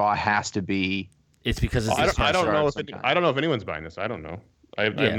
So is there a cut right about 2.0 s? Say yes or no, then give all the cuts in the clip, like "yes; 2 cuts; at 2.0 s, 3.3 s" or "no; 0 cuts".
no; 0 cuts